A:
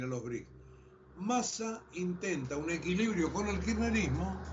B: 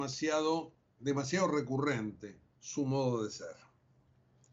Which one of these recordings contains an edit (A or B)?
B